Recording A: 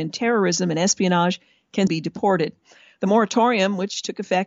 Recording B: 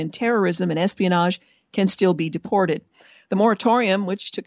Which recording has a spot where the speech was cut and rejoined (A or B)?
A